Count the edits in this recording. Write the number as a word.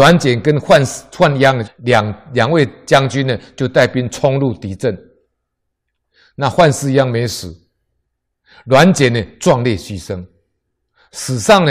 one